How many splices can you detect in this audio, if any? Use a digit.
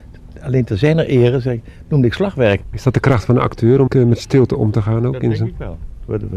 2